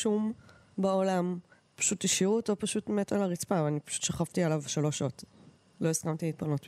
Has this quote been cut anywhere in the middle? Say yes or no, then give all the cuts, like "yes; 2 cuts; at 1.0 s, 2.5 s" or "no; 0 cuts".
no; 0 cuts